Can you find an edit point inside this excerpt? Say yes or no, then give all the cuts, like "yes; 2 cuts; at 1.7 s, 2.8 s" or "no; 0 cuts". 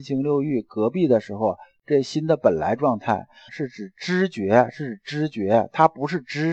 yes; 1 cut; at 3.5 s